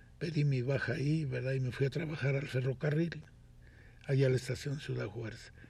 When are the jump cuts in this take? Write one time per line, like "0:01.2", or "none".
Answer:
none